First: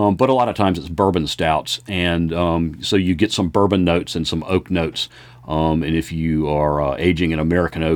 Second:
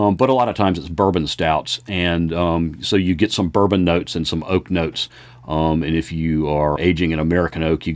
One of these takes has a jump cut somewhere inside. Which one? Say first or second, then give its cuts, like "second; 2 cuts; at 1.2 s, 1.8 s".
second; 1 cut; at 6.8 s